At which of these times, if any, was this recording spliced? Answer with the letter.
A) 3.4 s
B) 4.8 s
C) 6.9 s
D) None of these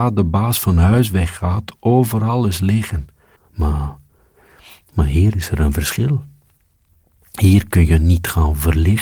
A